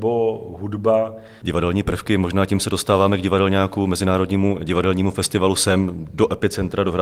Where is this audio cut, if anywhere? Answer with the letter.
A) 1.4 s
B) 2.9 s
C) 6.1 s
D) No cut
A